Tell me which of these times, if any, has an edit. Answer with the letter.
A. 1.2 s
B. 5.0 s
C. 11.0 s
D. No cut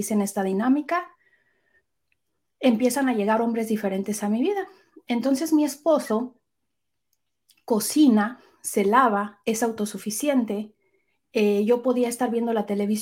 D